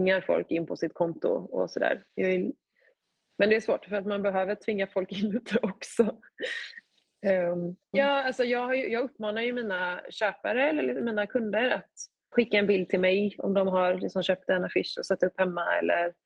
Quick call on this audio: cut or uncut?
cut